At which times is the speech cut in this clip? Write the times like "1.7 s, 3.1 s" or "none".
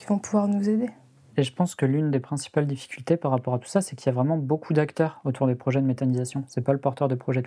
none